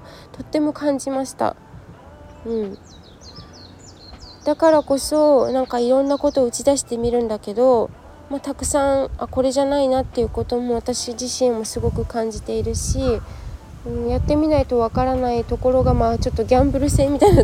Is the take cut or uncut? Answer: uncut